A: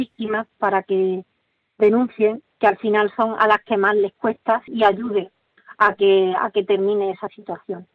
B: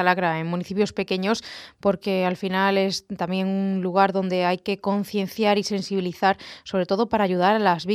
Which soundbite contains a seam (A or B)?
A